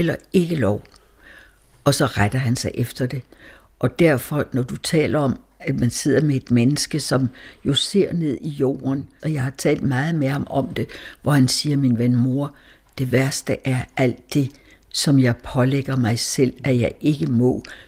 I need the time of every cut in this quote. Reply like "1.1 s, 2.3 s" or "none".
9.2 s